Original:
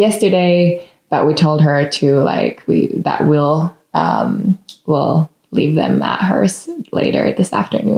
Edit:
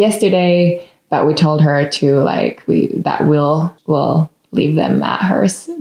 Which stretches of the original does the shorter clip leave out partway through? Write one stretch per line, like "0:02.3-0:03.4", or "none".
0:03.8-0:04.8